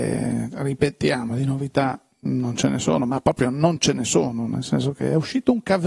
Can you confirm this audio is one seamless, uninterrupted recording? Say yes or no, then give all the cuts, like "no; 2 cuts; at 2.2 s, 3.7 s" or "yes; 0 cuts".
yes; 0 cuts